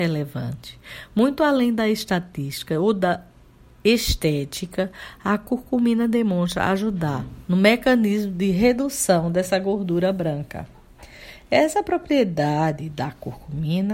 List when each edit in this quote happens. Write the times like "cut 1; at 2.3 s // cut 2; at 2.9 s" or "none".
none